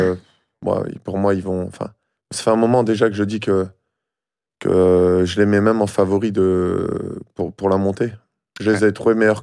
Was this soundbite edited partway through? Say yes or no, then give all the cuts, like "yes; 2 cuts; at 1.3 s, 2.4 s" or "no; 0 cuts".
no; 0 cuts